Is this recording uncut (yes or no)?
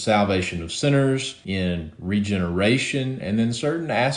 yes